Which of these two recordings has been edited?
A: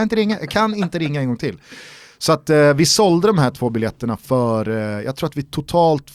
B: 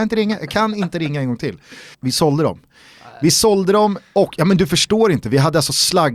B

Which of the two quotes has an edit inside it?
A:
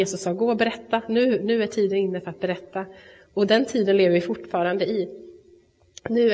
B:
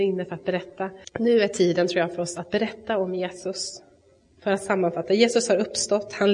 B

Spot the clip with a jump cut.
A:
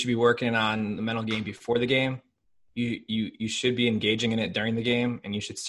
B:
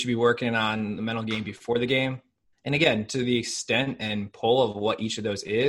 B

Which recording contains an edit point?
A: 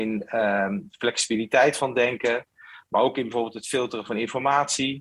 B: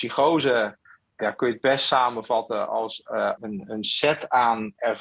B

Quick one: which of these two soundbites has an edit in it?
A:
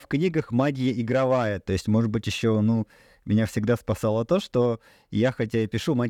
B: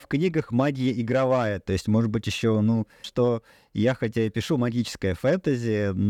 B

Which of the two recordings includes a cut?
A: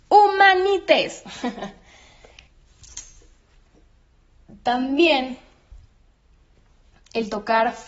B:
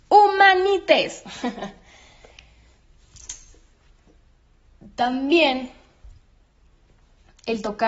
A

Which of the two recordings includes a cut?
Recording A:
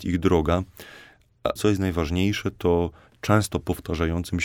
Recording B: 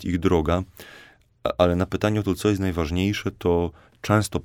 A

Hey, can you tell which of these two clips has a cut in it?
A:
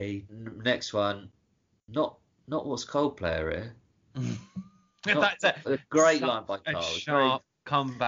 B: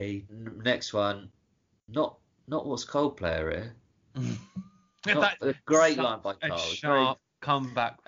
B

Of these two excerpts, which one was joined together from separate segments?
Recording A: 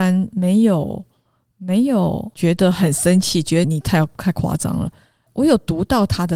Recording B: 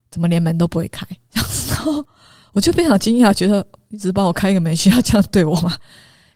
A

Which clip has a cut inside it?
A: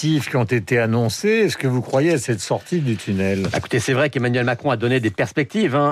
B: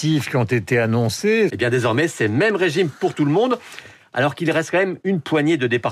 B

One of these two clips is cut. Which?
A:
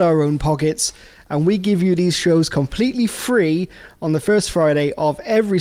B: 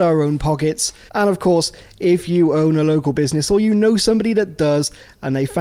B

